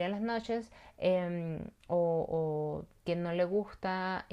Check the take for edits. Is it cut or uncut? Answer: uncut